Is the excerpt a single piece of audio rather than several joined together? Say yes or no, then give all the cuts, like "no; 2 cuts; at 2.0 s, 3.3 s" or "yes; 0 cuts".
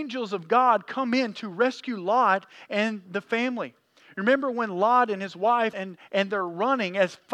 no; 1 cut; at 5.7 s